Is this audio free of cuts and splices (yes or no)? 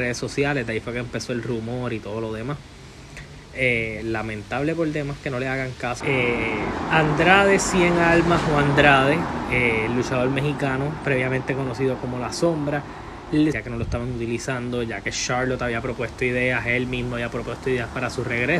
no